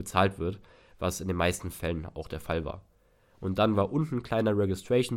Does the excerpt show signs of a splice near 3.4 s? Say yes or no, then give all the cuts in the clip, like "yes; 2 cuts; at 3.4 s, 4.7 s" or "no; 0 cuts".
no; 0 cuts